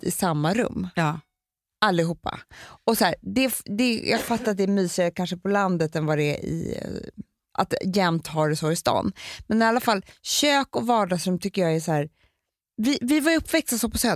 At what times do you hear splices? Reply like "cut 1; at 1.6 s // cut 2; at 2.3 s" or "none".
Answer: none